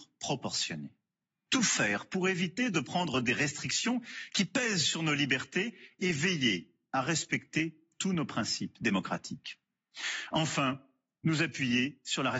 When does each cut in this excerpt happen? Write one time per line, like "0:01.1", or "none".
none